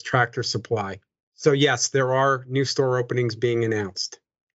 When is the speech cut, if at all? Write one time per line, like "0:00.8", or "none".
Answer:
none